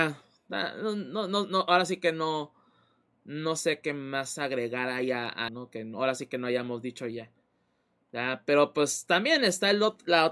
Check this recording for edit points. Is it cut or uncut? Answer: cut